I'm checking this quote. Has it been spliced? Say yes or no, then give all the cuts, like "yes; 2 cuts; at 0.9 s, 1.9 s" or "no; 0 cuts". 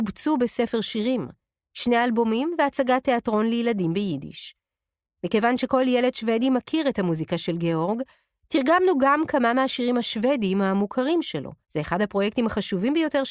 yes; 3 cuts; at 5.0 s, 8.4 s, 11.6 s